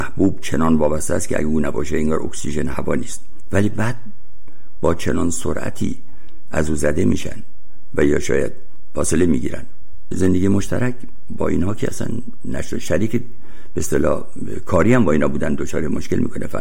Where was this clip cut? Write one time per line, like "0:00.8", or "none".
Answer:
0:10.1